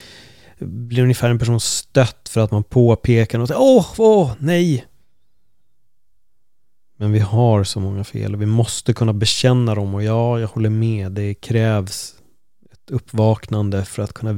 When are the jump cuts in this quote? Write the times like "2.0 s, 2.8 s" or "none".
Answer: none